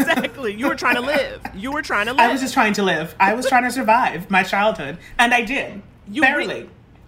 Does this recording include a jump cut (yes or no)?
no